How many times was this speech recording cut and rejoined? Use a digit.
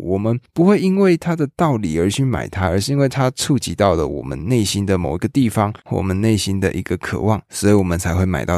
0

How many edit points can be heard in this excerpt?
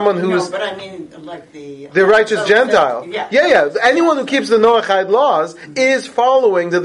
0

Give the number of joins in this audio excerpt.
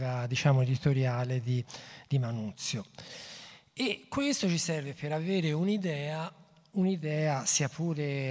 0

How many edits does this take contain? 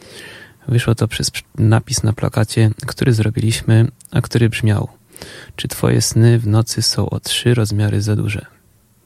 0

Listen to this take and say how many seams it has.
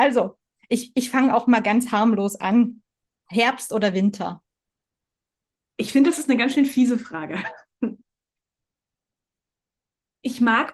0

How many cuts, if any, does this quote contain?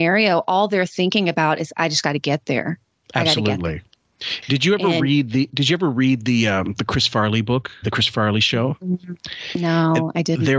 1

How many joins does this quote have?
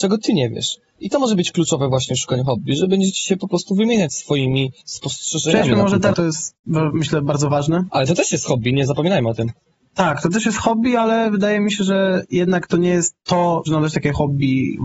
3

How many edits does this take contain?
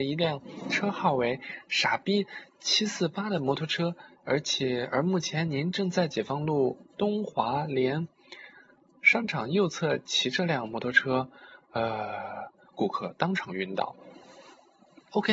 0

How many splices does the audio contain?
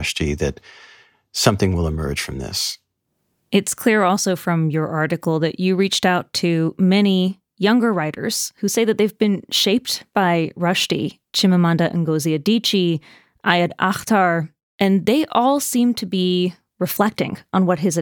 1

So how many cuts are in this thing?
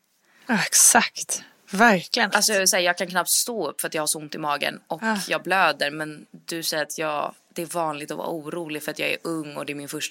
1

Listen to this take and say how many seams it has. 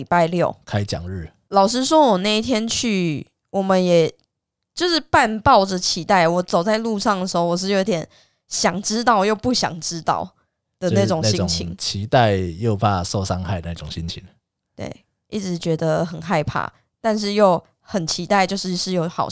1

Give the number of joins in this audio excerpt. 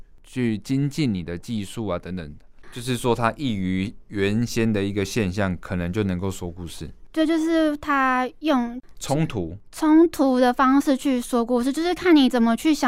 1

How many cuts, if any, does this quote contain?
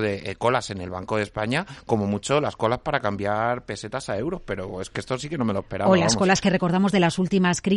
0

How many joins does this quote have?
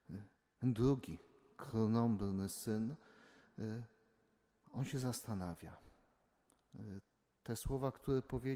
0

